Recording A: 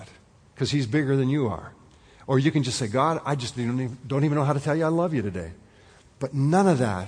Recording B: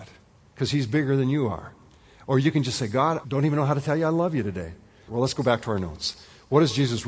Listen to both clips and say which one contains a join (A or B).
B